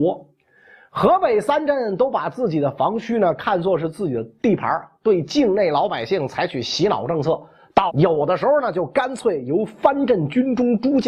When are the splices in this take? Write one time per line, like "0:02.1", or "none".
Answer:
0:07.9